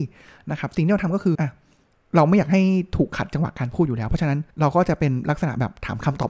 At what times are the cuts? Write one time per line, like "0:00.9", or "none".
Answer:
0:01.3
0:04.5